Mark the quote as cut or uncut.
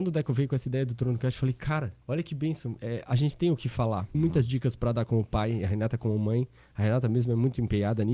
cut